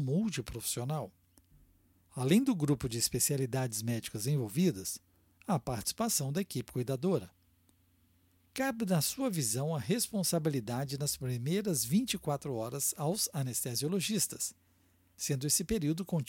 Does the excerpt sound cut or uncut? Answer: uncut